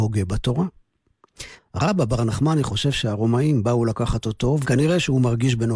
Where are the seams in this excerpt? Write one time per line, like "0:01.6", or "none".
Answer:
0:01.6
0:04.6